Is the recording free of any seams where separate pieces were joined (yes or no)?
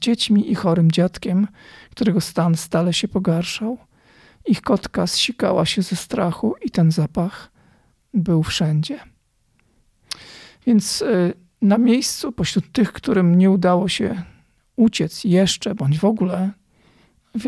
yes